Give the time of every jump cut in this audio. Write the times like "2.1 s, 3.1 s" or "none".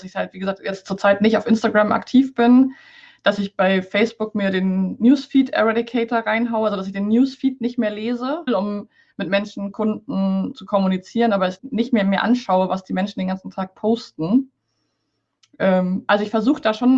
8.5 s, 11.6 s